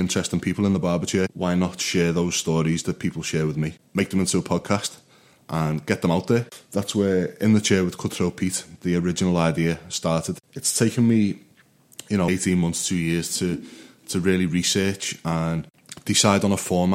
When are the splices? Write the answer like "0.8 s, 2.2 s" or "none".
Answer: 8.8 s, 12.3 s